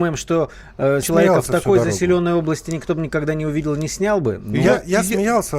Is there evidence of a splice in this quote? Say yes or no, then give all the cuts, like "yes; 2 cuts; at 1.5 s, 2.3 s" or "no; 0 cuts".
yes; 1 cut; at 1.0 s